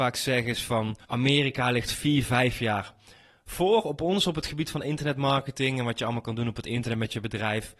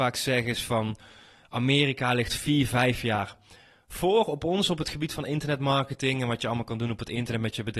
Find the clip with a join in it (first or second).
first